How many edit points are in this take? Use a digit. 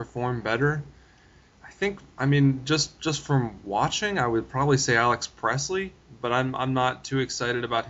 0